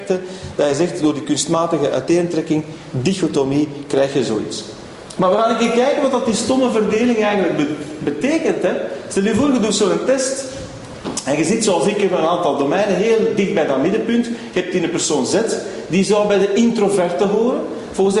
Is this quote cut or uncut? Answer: cut